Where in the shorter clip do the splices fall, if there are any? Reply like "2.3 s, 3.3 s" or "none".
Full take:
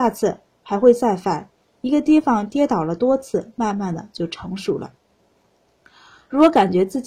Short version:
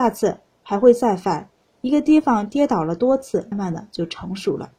3.5 s